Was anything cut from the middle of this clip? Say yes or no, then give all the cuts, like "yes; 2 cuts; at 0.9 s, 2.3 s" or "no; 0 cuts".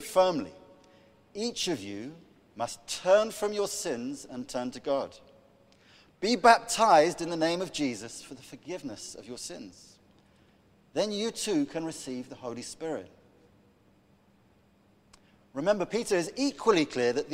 no; 0 cuts